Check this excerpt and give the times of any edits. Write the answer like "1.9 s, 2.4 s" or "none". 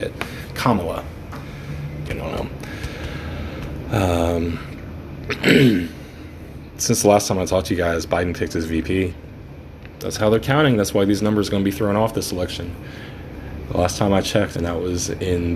2.0 s, 9.1 s, 14.5 s